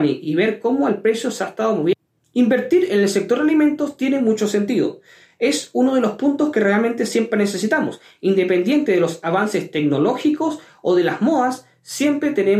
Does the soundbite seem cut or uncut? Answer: uncut